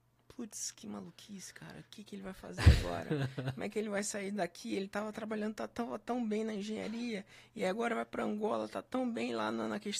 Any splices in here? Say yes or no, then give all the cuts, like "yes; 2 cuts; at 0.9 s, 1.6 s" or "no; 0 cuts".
no; 0 cuts